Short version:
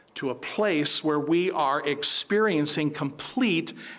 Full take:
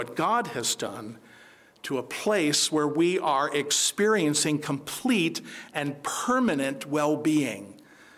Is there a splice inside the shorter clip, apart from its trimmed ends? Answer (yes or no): no